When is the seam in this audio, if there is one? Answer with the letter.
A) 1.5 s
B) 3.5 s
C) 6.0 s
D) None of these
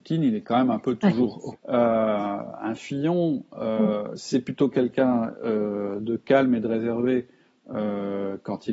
A